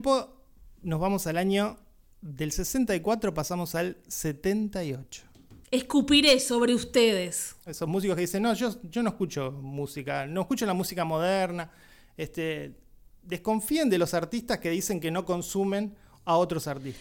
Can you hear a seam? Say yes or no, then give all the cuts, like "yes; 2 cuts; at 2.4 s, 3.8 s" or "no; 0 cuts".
yes; 2 cuts; at 5.6 s, 7.7 s